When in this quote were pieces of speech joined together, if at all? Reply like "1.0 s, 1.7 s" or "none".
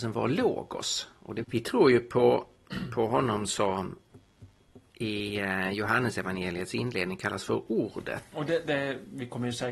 1.4 s, 8.3 s